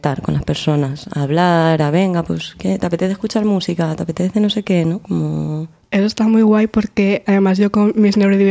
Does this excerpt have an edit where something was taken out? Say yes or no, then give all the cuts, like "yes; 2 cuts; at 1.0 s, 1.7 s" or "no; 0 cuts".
no; 0 cuts